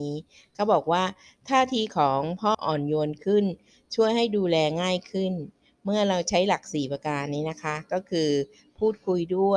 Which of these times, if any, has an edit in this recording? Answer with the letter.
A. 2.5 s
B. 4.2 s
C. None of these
A